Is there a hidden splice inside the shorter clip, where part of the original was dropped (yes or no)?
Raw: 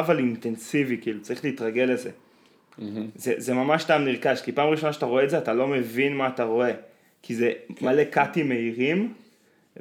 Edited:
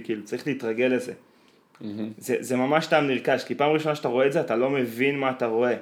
no